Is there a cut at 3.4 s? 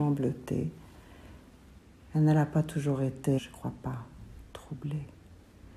yes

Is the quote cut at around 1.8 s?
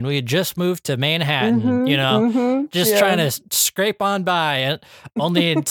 no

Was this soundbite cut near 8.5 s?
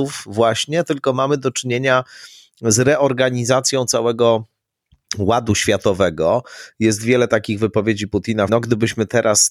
yes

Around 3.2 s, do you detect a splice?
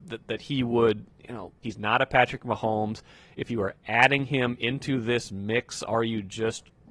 no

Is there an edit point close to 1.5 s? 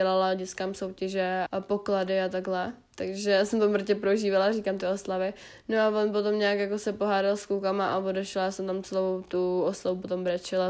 yes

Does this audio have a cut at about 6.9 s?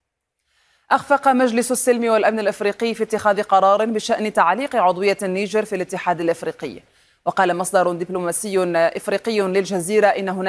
no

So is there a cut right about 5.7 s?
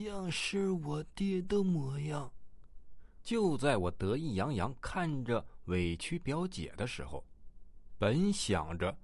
no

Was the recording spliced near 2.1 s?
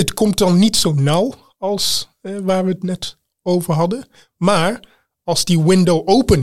no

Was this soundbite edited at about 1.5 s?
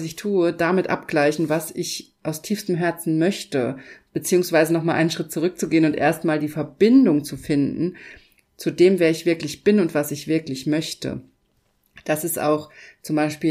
no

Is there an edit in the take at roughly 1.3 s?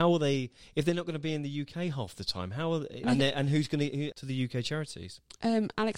no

